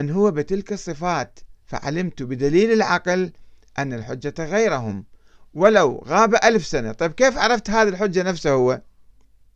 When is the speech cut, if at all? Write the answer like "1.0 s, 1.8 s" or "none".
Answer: 1.6 s